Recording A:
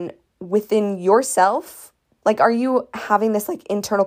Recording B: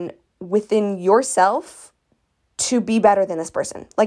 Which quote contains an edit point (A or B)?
A